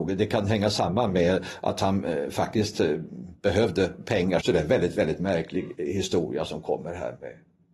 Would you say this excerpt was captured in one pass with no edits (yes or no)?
no